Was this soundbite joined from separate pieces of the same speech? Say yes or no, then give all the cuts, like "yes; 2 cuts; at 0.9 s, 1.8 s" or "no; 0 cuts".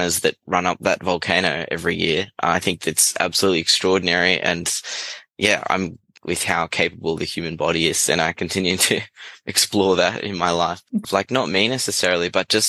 yes; 2 cuts; at 6.2 s, 11.0 s